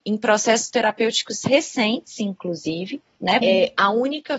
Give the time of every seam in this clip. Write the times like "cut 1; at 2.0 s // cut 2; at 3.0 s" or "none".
cut 1; at 3.4 s